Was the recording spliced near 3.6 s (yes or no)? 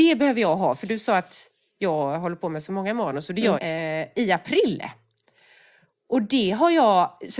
yes